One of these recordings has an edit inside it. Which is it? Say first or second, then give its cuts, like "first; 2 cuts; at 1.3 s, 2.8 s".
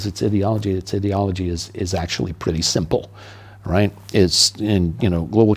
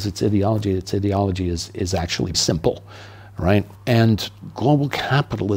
second; 2 cuts; at 2.3 s, 3.7 s